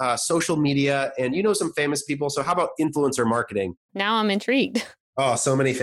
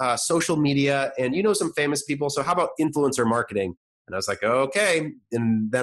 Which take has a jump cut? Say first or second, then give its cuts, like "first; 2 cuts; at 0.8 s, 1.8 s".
first; 1 cut; at 3.9 s